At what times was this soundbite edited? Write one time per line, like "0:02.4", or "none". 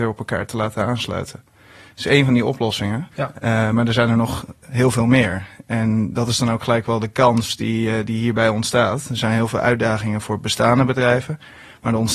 0:03.1

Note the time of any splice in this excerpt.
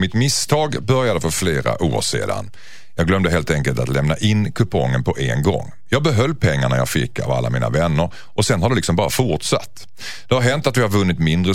none

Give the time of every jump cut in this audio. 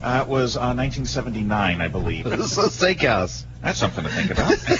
0:02.2

